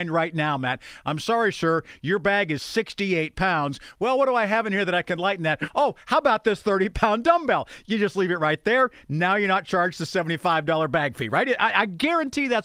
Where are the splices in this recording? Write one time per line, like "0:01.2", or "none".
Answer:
none